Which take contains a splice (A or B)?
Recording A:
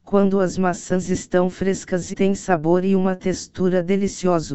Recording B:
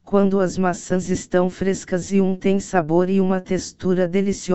A